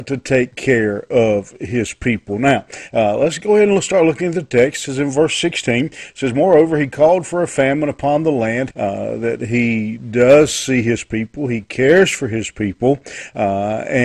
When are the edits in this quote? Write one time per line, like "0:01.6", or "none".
0:08.7